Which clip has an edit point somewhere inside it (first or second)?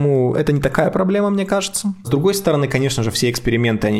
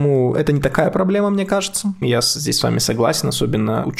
second